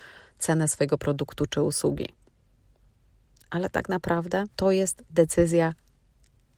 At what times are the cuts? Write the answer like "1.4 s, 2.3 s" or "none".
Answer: 4.5 s